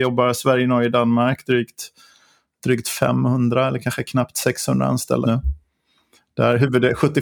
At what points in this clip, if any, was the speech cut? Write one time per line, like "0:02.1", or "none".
0:05.2